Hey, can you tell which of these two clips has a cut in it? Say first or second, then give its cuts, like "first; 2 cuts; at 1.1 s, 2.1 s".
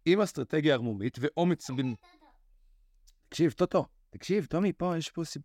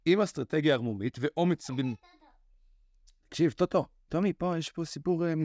second; 1 cut; at 4.1 s